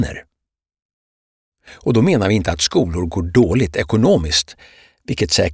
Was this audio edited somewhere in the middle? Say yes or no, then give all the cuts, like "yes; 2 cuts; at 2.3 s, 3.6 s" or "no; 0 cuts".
yes; 1 cut; at 1.5 s